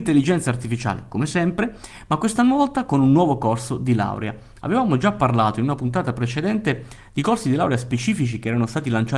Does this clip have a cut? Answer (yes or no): no